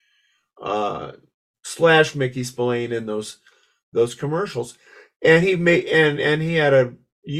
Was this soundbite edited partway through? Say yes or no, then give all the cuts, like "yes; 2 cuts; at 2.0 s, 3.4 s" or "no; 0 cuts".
no; 0 cuts